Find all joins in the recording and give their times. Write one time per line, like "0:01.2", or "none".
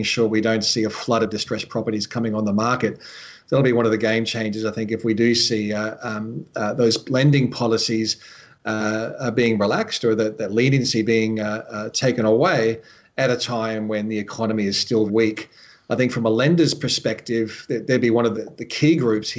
0:15.1
0:18.3